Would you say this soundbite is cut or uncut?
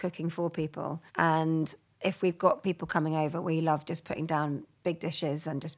cut